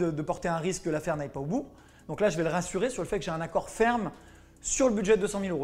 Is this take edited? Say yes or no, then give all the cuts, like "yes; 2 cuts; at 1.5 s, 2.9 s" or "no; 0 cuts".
no; 0 cuts